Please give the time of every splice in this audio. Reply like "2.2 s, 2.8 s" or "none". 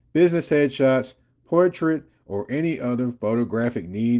none